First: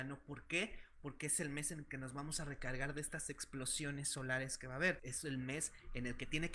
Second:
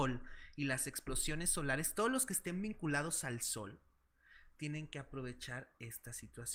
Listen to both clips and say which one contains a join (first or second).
first